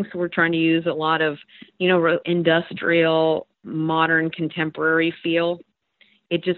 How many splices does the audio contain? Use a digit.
1